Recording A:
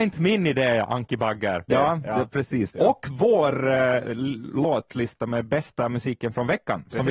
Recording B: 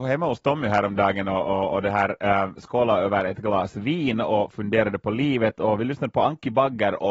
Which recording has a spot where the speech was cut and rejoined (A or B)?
A